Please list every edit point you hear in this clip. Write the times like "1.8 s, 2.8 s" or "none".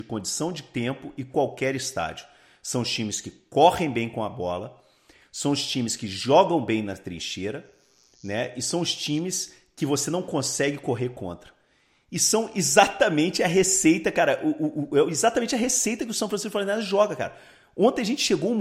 none